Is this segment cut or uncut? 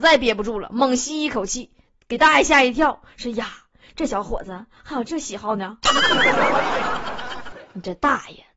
uncut